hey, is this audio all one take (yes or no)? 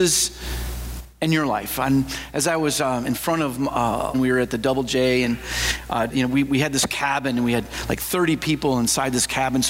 no